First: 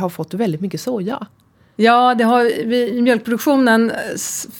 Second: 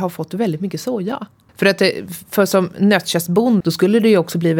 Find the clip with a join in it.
second; 2 cuts; at 1.5 s, 3.6 s

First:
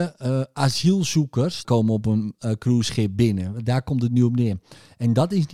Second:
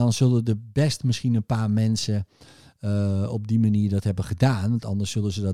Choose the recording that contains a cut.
first; 1 cut; at 1.6 s

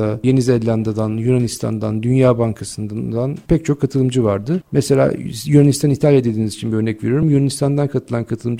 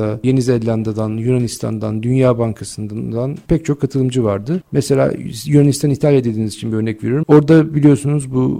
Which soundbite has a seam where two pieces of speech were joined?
second; 1 cut; at 7.2 s

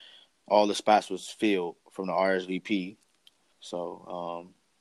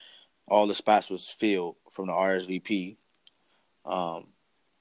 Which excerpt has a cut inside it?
first; 1 cut; at 3.5 s

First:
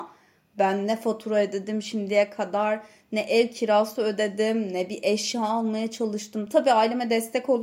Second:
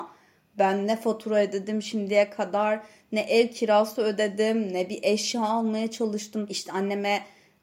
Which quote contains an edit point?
second; 1 cut; at 6.5 s

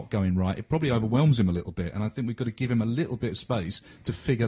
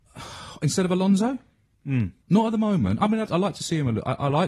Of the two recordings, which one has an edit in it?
second; 2 cuts; at 2.2 s, 3.3 s

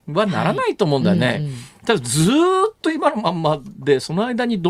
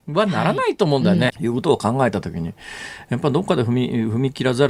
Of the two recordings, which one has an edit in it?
second; 1 cut; at 1.3 s

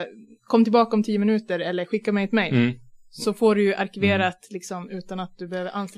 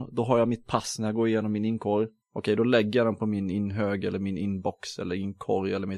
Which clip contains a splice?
second; 1 cut; at 2.2 s

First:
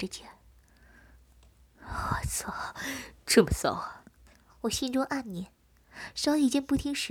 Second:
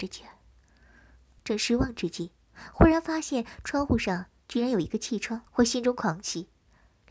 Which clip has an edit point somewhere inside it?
second; 2 cuts; at 1.4 s, 5.5 s

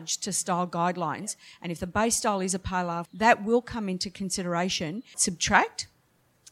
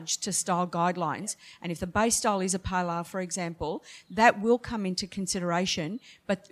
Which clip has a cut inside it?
first; 2 cuts; at 3.1 s, 5.1 s

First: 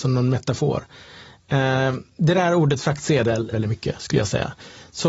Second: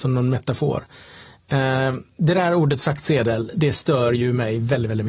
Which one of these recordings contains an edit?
first; 1 cut; at 3.5 s

